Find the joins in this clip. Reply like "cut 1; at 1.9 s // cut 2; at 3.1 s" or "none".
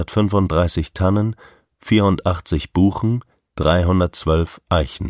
none